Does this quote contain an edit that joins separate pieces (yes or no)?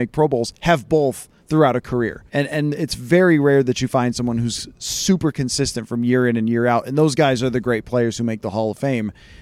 yes